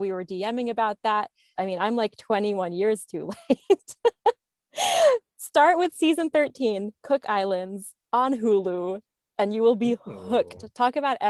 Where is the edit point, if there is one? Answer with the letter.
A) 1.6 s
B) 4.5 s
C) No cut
A